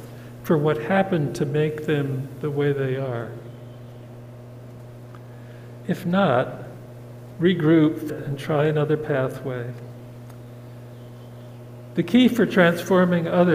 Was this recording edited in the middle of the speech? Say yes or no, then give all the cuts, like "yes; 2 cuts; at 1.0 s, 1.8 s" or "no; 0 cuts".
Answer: yes; 1 cut; at 8.1 s